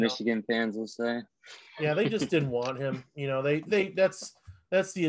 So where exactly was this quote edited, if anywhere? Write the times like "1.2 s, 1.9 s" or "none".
none